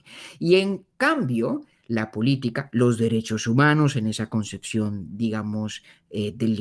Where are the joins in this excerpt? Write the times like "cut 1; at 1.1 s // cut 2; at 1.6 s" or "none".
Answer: none